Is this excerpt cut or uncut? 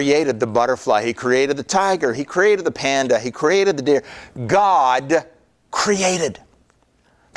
cut